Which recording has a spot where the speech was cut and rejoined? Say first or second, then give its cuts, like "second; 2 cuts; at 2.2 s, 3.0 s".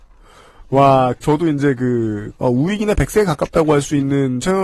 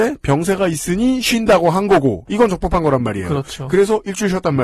first; 2 cuts; at 1.2 s, 2.4 s